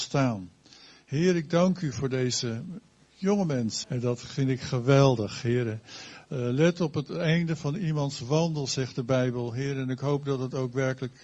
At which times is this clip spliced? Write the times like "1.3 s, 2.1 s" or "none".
3.8 s